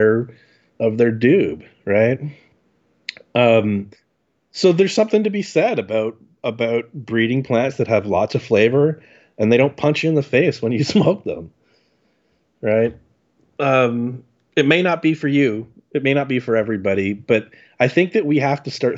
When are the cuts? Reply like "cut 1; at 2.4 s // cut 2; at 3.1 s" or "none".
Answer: none